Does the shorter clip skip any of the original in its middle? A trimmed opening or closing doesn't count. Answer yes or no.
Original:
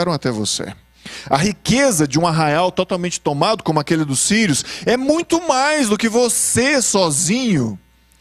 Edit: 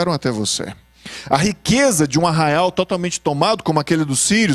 no